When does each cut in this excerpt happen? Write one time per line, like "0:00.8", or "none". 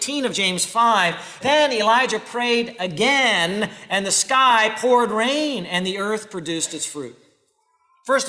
0:01.4